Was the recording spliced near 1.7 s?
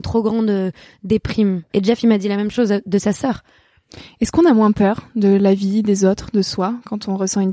yes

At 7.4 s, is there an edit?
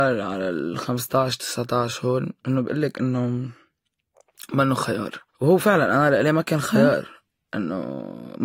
no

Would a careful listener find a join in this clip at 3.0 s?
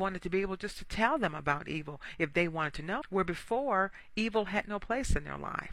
yes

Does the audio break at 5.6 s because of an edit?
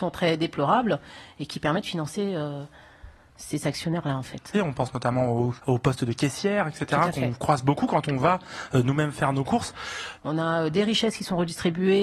yes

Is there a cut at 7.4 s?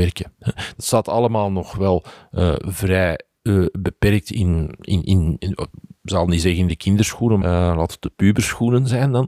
yes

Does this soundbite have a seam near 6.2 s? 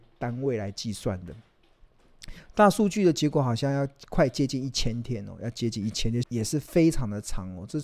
yes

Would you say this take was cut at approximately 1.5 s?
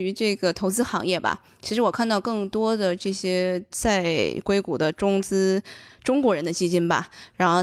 no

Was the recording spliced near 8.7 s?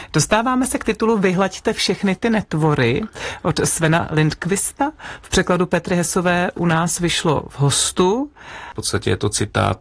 yes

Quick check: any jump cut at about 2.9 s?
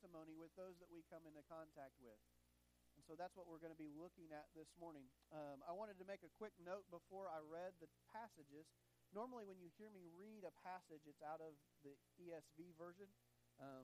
no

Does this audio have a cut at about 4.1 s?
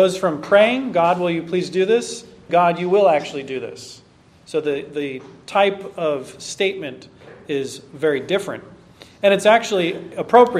no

